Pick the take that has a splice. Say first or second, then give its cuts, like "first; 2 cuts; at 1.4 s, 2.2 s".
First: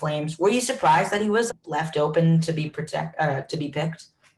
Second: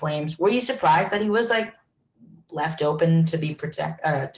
first; 1 cut; at 1.5 s